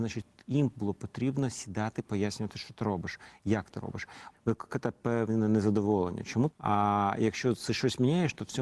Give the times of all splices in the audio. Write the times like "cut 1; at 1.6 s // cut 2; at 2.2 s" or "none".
cut 1; at 4.3 s // cut 2; at 6.5 s